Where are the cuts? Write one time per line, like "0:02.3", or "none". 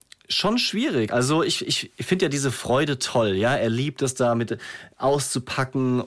none